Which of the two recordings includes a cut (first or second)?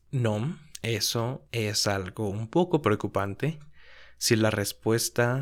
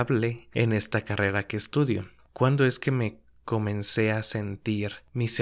second